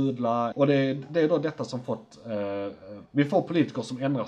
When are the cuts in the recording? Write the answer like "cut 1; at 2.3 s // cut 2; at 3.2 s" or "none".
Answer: none